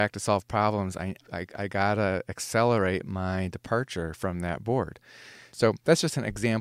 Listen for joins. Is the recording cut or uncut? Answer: cut